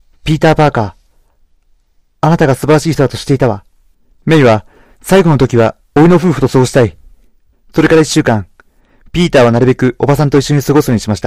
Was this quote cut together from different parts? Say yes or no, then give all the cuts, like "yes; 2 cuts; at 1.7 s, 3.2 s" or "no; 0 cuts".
yes; 2 cuts; at 4.1 s, 7.5 s